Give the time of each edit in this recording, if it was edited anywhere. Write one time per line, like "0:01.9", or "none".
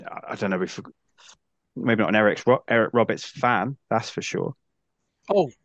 0:03.8